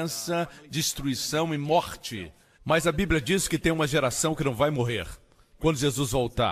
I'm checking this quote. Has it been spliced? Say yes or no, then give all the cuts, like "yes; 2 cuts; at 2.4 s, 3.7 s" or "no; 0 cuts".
yes; 1 cut; at 2.5 s